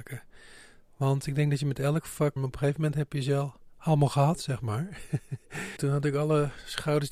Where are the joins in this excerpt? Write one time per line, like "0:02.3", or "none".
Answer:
0:02.4
0:05.8